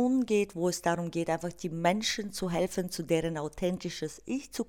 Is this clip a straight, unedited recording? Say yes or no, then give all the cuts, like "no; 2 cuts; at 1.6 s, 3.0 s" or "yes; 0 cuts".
yes; 0 cuts